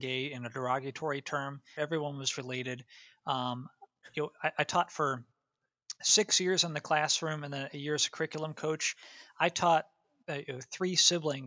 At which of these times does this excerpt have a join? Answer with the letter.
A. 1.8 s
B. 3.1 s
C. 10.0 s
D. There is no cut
A